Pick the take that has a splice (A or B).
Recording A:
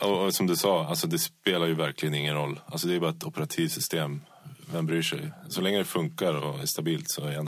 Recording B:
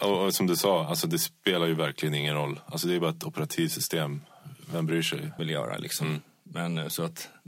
B